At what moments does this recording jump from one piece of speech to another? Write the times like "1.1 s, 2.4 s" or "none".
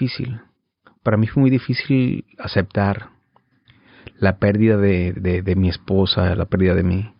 none